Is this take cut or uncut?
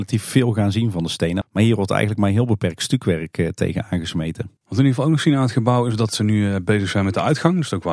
cut